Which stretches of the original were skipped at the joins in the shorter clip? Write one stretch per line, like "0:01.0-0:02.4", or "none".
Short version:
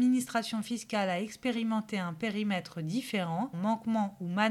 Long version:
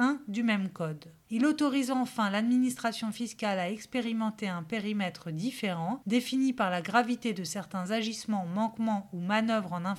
0:06.0-0:08.5